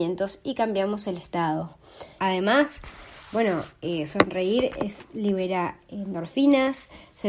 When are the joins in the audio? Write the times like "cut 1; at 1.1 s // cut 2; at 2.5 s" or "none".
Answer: cut 1; at 2.2 s